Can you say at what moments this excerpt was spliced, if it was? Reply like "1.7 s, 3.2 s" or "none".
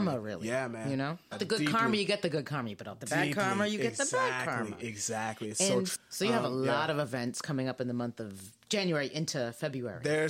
1.3 s, 5.9 s